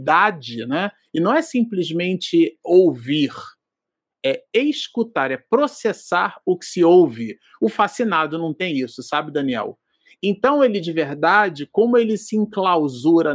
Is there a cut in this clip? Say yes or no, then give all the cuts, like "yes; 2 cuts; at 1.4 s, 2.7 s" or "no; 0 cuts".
no; 0 cuts